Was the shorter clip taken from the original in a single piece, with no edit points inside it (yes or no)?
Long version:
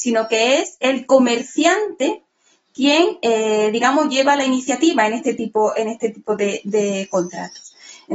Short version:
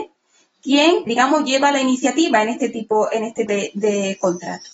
no